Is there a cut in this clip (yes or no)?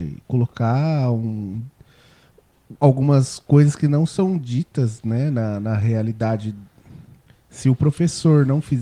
no